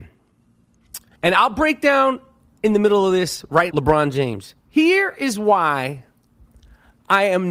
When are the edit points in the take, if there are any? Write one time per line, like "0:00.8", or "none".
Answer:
0:01.2
0:03.7